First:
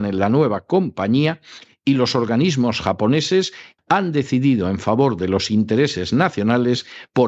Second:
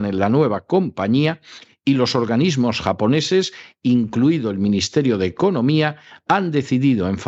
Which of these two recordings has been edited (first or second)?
first